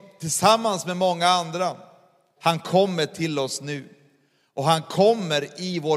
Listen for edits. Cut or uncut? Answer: cut